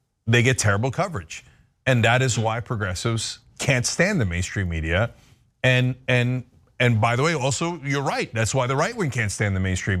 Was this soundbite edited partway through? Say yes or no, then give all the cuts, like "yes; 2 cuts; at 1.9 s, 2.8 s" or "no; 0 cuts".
no; 0 cuts